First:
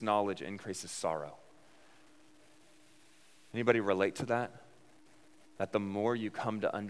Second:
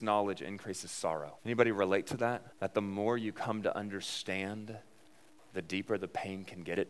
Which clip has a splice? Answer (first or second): second